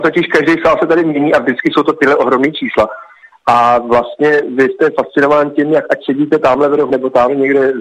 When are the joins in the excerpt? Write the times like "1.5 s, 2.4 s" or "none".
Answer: 6.9 s